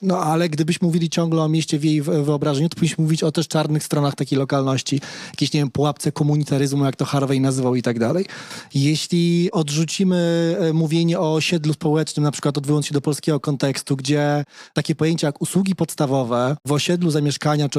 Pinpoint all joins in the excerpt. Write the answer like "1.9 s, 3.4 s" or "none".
none